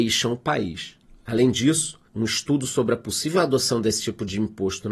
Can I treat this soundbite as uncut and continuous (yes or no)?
no